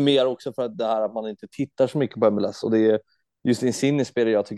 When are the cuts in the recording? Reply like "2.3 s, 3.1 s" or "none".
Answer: none